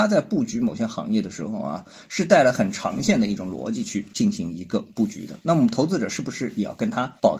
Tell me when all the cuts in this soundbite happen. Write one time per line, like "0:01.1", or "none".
none